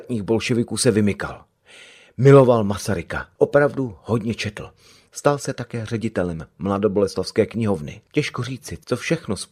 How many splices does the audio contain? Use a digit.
2